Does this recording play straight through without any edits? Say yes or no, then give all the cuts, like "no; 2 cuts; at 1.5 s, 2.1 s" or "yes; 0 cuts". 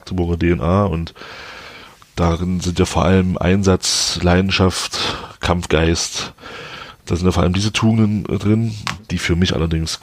yes; 0 cuts